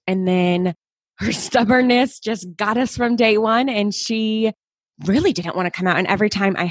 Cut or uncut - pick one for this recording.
uncut